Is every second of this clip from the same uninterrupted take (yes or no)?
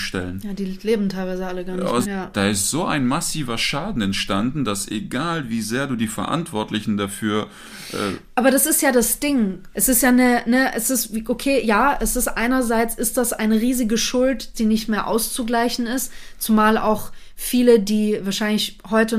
no